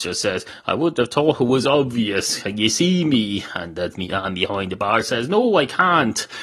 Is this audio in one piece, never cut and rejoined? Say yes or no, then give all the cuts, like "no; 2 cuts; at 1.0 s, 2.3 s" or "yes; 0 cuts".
yes; 0 cuts